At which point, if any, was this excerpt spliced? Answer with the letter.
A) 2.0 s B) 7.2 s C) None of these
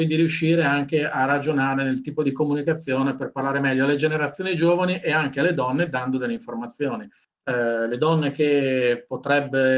B